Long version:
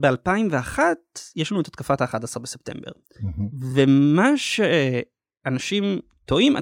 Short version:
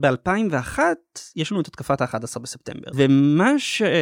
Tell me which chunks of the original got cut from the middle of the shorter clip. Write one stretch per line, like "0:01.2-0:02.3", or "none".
0:02.9-0:03.7